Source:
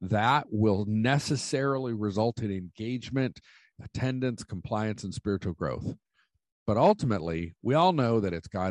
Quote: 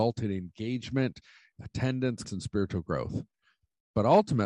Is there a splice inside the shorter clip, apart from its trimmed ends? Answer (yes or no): yes